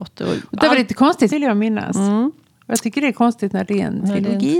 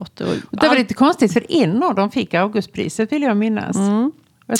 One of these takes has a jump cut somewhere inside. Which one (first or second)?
first